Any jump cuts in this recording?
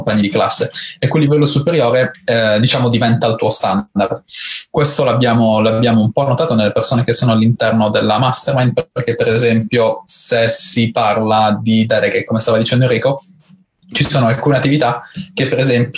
no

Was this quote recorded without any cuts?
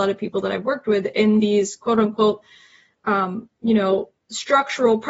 yes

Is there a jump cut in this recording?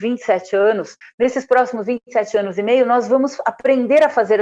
yes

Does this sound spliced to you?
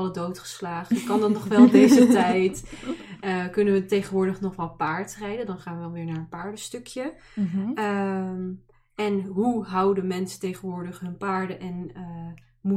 no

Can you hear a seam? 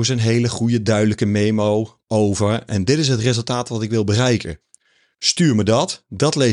no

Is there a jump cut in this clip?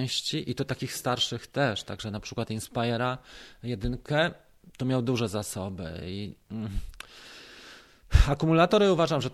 no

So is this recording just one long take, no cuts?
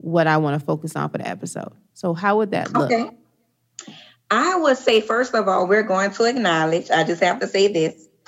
yes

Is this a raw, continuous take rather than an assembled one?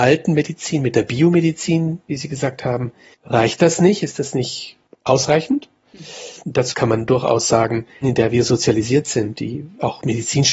no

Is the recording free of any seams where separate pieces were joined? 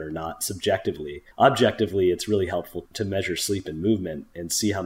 no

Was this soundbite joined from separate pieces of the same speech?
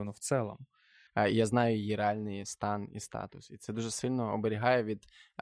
yes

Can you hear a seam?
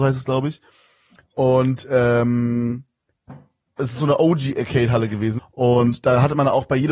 yes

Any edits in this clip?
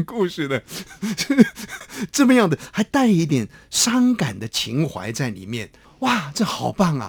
yes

